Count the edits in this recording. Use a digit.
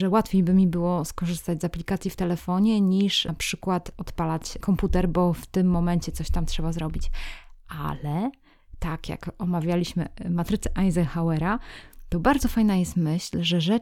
0